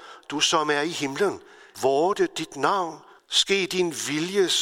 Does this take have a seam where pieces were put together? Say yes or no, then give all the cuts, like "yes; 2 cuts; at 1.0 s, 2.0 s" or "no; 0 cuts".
yes; 2 cuts; at 1.7 s, 3.2 s